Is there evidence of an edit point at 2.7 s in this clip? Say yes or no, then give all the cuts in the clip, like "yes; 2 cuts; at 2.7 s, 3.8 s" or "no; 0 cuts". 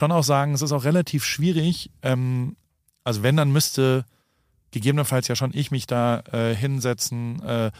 no; 0 cuts